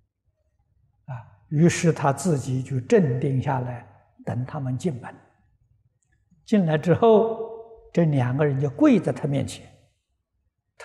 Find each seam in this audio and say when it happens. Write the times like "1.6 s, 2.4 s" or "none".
none